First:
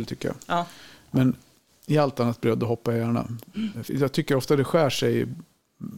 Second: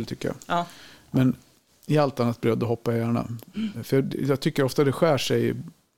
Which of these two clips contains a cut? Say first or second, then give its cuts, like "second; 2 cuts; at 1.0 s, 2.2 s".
first; 1 cut; at 3.9 s